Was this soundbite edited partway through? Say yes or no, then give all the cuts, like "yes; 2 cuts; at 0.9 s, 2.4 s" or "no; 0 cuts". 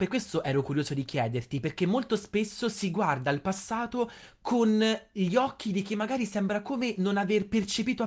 no; 0 cuts